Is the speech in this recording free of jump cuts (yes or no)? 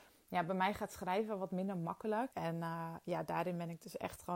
no